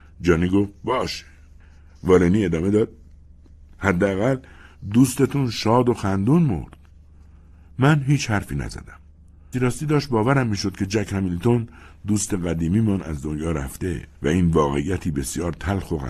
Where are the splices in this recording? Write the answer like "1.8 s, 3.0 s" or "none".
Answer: 9.5 s, 14.1 s